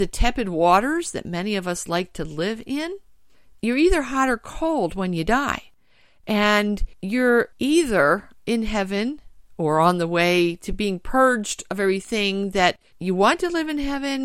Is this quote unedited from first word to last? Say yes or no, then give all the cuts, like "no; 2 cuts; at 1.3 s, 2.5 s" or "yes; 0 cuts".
no; 3 cuts; at 3.5 s, 8.4 s, 12.9 s